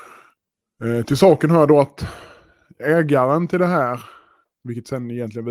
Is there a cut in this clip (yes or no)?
yes